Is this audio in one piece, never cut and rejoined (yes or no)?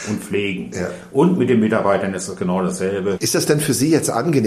no